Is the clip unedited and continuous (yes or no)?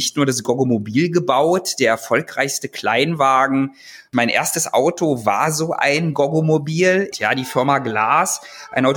no